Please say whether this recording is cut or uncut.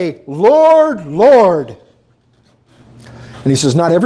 uncut